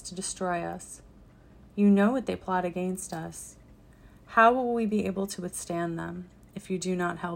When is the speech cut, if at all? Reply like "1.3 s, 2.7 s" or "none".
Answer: none